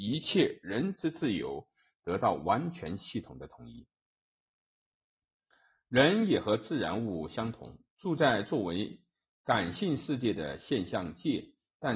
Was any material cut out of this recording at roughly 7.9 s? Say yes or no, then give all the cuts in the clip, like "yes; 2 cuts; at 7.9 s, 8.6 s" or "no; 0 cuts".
no; 0 cuts